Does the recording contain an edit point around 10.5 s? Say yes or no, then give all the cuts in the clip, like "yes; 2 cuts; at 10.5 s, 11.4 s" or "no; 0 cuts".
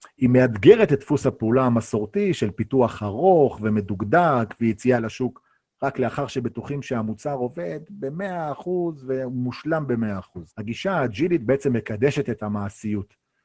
yes; 1 cut; at 10.5 s